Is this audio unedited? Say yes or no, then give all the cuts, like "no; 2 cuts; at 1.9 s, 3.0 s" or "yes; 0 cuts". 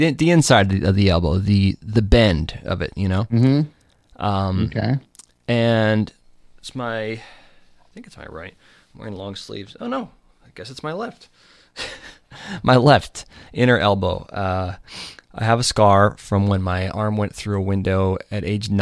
yes; 0 cuts